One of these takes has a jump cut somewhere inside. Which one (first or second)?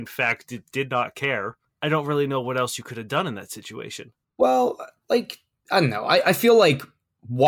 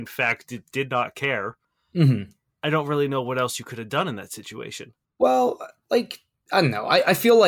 first